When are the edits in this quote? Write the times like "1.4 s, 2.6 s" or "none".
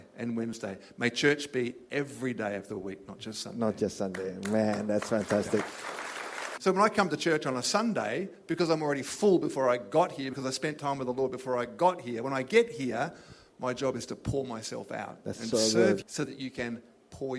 6.6 s, 16.0 s